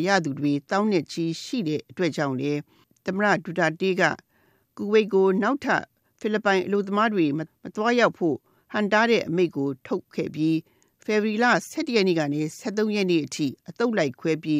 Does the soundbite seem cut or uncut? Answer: uncut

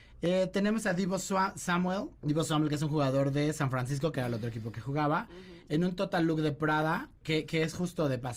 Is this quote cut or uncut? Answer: cut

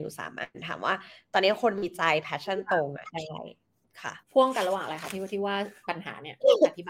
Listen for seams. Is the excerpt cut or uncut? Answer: cut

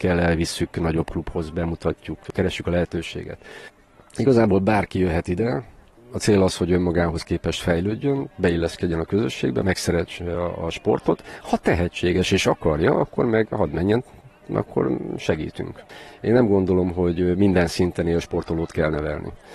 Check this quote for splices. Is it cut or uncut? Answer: uncut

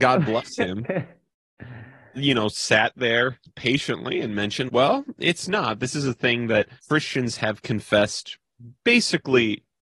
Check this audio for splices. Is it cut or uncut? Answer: cut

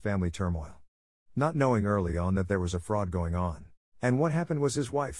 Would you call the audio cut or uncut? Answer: cut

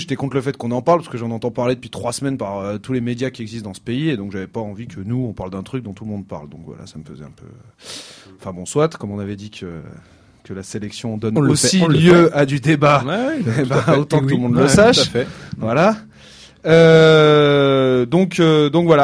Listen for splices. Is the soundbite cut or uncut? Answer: uncut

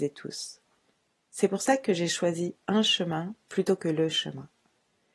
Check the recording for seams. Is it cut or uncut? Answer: uncut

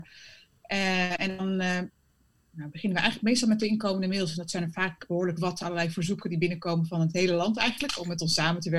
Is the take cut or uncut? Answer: uncut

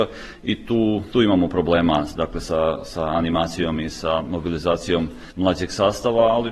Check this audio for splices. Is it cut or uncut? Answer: uncut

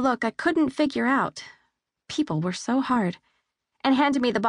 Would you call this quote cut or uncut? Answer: uncut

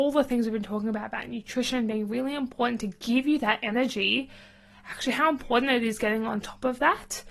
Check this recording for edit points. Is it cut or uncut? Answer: uncut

